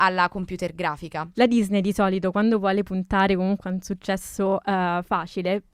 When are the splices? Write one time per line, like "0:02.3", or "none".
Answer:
0:01.3